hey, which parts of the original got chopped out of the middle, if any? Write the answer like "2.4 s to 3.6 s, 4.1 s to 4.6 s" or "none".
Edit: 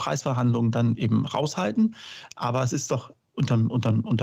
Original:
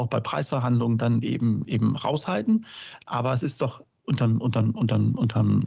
1.2 s to 1.7 s

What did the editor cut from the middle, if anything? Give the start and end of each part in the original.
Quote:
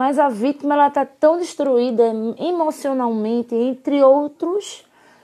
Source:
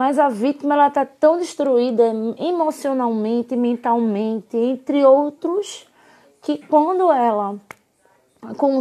3.5 s to 4.5 s

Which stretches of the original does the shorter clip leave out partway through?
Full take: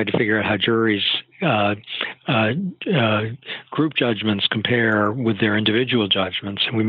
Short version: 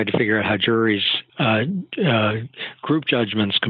1.3 s to 2.2 s

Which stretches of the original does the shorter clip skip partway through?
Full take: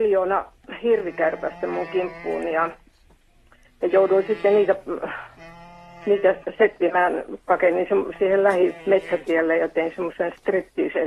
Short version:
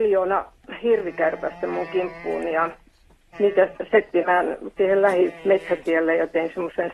3.3 s to 6.0 s, 7.4 s to 8.2 s

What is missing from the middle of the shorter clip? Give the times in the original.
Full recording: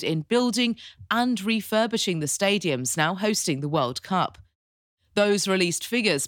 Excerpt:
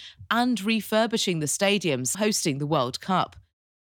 2.9 s to 3.2 s

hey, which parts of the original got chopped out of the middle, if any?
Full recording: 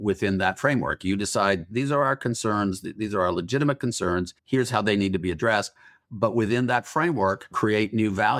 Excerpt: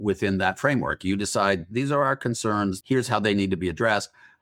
2.8 s to 4.4 s

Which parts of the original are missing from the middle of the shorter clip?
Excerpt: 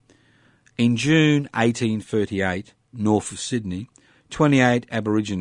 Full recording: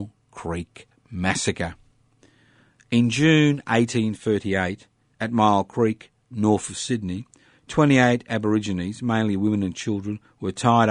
4.9 s to 6.2 s

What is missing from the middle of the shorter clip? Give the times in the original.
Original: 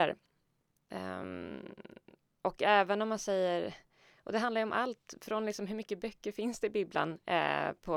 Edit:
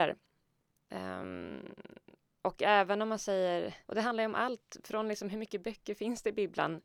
3.8 s to 4.2 s

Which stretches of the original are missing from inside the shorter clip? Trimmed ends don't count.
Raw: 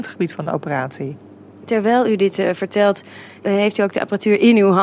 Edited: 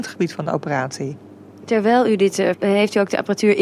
2.5 s to 3.4 s

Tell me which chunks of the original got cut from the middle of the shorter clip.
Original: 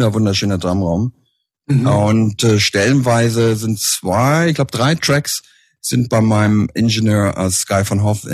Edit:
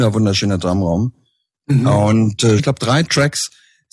2.6 s to 4.5 s

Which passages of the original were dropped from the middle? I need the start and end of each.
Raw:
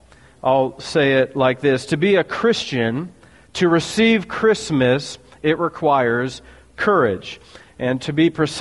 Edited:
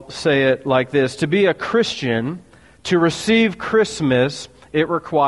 none

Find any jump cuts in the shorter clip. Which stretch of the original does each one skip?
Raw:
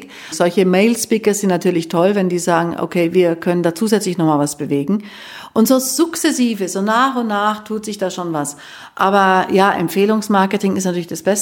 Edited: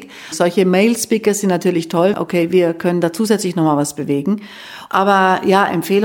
2.1 s to 2.8 s, 5.5 s to 8.9 s

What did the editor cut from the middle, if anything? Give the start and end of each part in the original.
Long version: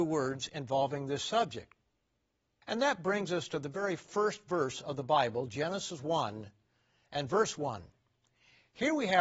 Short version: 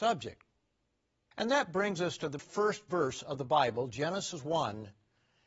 3.7 s to 4.0 s

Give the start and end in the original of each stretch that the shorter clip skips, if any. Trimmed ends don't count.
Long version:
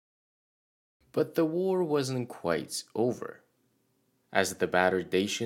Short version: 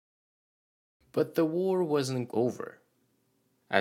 2.3 s to 2.9 s

